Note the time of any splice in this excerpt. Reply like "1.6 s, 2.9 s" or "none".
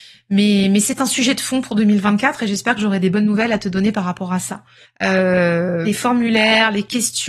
4.8 s, 5.8 s